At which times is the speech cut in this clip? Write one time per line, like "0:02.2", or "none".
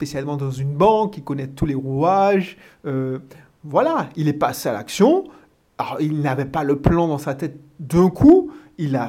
none